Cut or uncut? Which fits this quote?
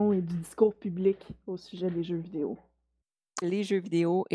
cut